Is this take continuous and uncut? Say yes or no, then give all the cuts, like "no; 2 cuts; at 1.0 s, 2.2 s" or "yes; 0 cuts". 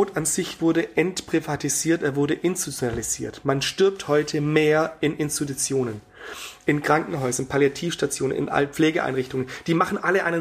yes; 0 cuts